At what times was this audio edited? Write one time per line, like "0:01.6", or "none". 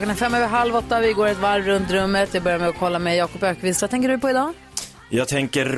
none

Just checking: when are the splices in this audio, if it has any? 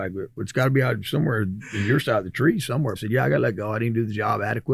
0:03.0

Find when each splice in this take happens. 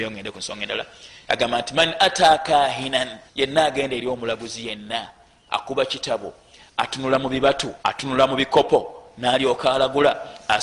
0:03.3
0:07.8

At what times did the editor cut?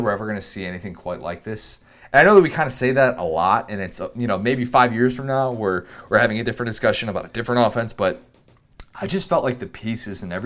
none

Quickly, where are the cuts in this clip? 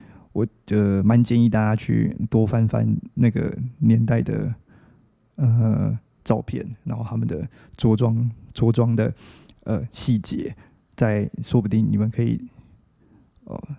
none

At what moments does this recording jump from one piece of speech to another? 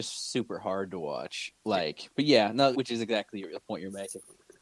0:02.7

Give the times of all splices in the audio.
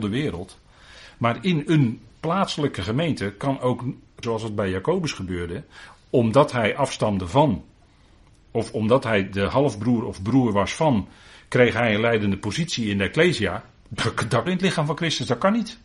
0:04.2
0:14.5

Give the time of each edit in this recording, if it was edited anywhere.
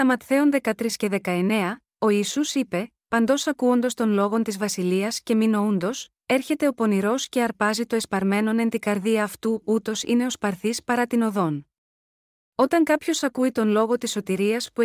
0:12.4

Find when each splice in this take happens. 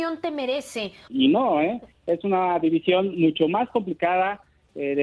0:01.1

